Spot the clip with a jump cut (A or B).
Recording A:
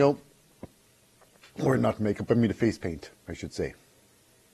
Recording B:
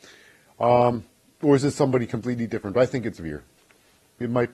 B